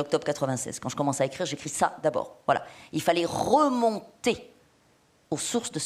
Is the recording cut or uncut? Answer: uncut